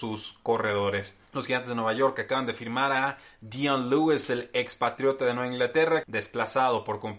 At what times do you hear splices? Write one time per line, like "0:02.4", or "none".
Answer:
0:01.3
0:06.0